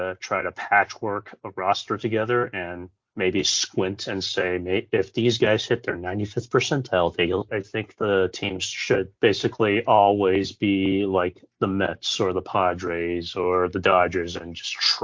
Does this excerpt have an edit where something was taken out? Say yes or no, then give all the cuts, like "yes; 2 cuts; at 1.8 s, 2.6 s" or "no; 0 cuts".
yes; 2 cuts; at 7.5 s, 9.2 s